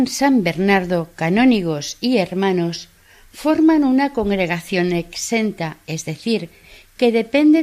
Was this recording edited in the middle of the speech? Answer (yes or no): no